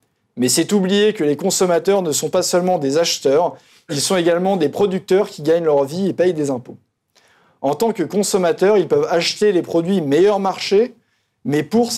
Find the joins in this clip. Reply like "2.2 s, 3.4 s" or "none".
none